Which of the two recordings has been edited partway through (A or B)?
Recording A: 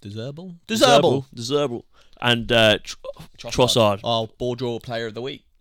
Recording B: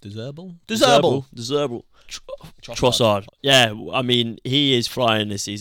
B